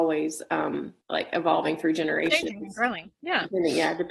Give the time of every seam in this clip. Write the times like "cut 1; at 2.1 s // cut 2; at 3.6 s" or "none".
cut 1; at 1.0 s